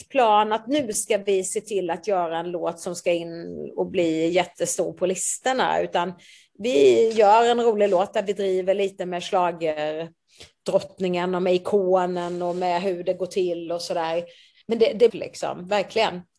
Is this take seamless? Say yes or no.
no